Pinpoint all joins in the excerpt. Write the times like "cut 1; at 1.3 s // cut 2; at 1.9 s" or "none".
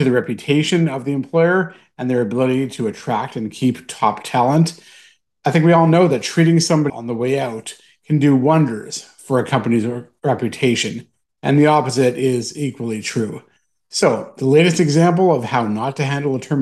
cut 1; at 6.9 s